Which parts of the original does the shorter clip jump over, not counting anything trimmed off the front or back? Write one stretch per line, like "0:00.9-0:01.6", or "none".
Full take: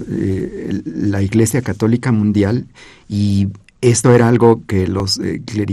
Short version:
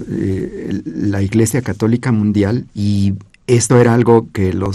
0:02.7-0:03.0